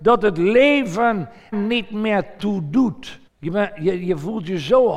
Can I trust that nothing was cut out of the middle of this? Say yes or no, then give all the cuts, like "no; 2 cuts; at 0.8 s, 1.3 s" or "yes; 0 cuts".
no; 2 cuts; at 1.5 s, 3.3 s